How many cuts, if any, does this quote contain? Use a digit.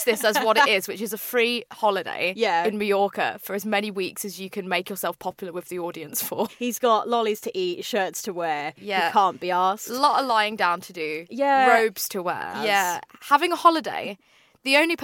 2